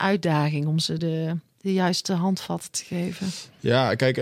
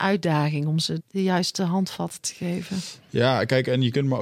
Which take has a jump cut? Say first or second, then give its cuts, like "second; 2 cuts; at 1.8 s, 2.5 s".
second; 1 cut; at 1.0 s